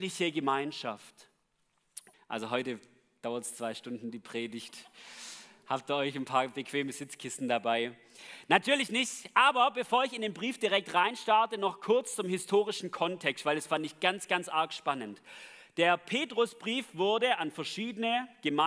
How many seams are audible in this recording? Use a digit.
1